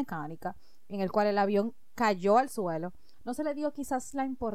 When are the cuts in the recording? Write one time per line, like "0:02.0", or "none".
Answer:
none